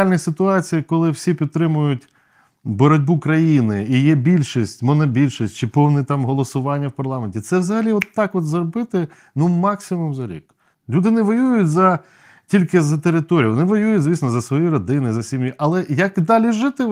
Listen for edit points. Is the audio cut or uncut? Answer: cut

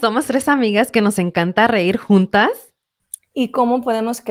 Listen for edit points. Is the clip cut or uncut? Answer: cut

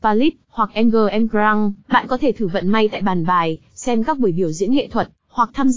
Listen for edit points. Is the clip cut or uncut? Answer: cut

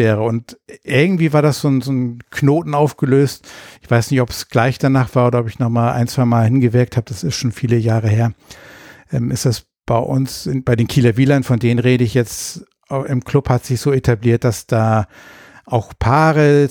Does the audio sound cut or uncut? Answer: uncut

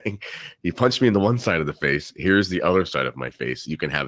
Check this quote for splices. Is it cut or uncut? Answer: uncut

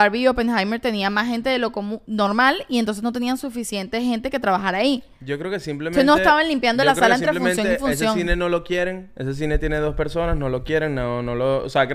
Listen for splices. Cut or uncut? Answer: uncut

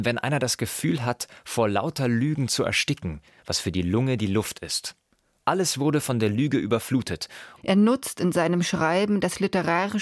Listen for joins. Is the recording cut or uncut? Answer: cut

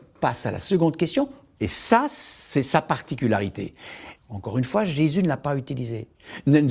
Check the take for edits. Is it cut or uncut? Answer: cut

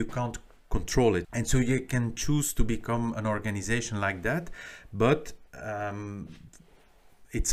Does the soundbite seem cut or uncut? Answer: cut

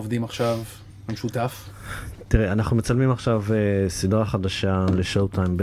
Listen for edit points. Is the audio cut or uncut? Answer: uncut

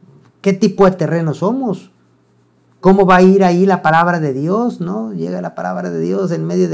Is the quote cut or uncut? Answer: uncut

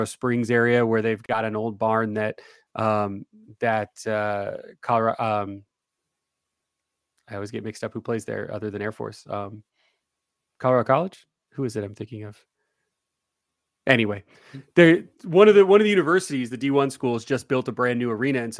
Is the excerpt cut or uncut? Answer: uncut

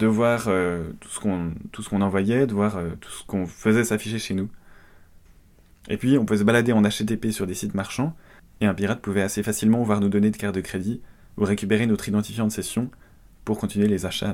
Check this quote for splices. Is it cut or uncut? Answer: uncut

